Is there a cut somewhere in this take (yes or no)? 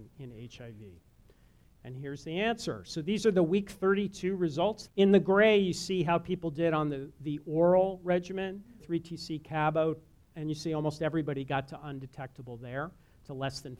yes